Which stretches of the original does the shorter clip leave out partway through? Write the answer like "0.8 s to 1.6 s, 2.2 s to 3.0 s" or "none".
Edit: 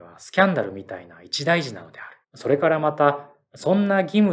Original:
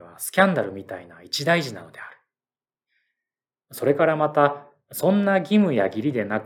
2.2 s to 3.6 s